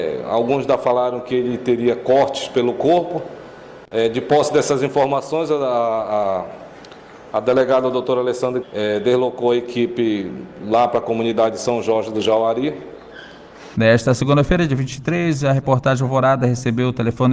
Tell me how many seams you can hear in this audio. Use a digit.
2